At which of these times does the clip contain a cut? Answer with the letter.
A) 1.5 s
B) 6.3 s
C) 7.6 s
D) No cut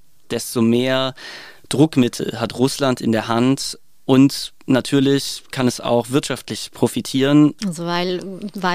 C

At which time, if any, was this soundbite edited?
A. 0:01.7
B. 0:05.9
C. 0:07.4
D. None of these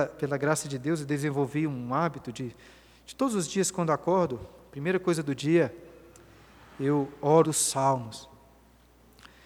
C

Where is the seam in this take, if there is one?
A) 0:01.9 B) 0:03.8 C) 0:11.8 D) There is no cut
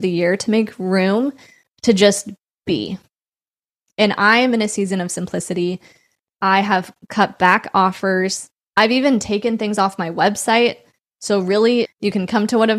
C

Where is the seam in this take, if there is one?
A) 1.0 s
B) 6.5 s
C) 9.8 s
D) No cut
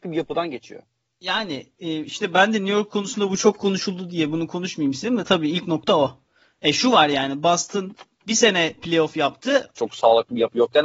C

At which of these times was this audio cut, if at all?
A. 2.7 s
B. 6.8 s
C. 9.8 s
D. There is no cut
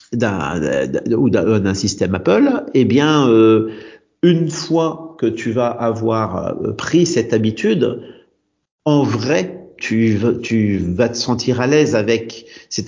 C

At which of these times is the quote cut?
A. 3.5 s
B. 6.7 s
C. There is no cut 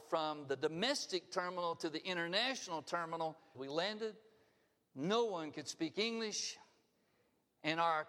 A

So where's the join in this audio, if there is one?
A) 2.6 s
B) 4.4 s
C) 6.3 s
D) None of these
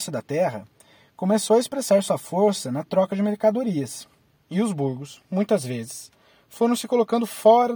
B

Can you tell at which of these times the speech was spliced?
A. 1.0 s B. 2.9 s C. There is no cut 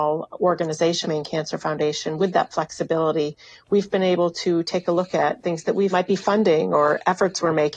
A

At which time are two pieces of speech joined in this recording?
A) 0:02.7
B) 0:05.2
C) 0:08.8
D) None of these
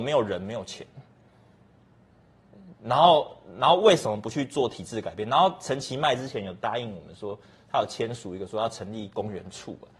D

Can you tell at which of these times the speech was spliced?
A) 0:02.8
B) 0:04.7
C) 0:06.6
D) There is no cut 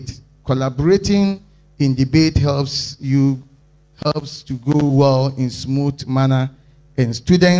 D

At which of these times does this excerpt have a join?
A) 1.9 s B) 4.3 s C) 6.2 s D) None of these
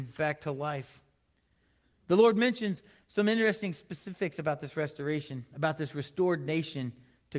D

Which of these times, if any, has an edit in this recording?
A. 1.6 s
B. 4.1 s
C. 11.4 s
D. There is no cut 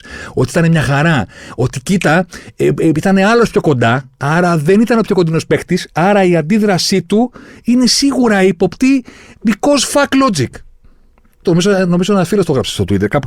C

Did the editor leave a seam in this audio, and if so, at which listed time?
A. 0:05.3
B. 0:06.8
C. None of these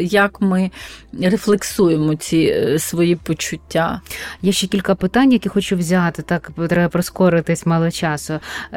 C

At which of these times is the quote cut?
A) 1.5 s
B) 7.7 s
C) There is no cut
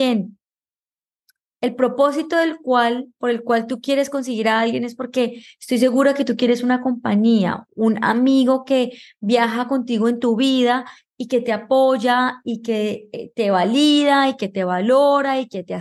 A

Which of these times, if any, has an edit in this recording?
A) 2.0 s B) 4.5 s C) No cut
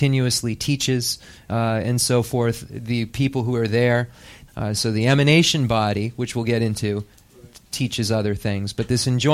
B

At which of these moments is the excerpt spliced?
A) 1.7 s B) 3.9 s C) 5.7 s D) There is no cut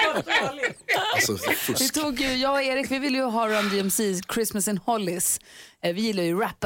D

